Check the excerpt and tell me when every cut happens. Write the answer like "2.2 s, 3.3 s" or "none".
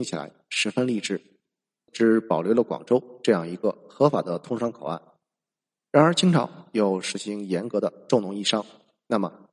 1.9 s

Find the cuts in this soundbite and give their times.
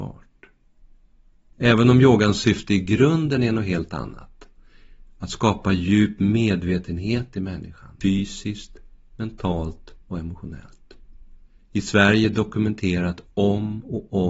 8.0 s

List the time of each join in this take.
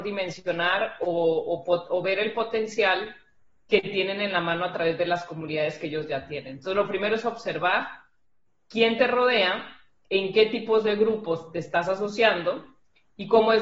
none

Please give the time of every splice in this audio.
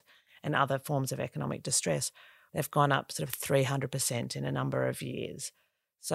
2.5 s

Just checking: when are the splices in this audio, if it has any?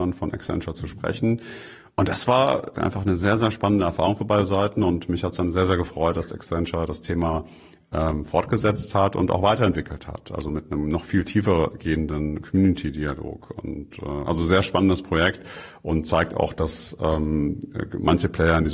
2.7 s

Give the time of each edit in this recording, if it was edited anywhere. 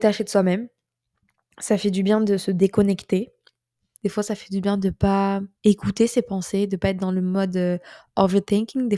4.0 s, 5.5 s

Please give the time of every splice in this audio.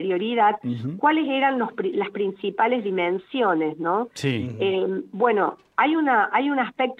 none

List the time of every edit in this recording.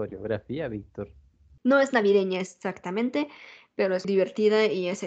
1.6 s, 4.0 s

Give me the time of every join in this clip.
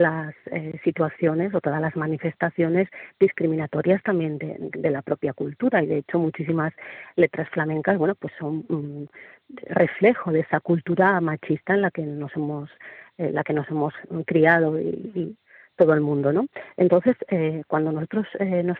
none

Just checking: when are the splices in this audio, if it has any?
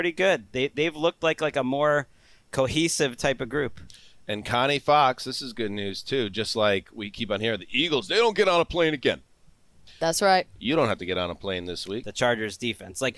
12.0 s

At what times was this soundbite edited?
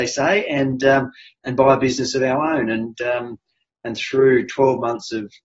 none

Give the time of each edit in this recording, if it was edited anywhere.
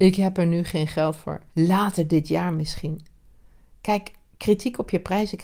1.5 s

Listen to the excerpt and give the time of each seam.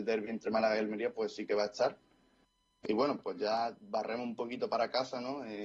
none

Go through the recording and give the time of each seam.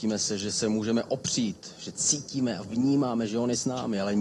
none

